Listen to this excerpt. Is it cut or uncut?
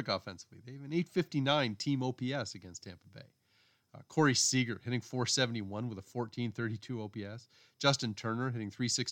uncut